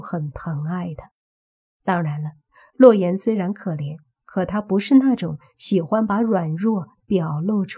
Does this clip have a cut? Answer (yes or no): no